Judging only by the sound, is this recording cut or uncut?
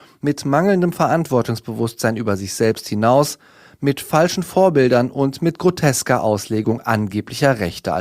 uncut